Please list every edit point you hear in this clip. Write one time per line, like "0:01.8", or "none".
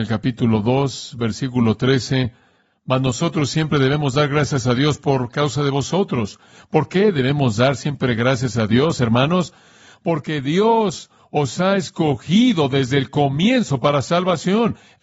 none